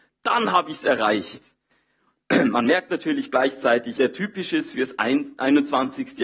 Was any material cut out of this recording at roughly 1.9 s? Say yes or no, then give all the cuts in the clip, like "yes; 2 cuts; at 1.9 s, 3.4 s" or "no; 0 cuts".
no; 1 cut; at 4.0 s